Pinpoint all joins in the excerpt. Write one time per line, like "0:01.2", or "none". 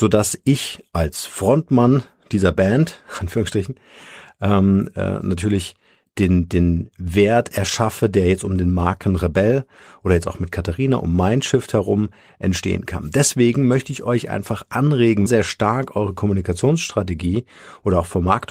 0:15.3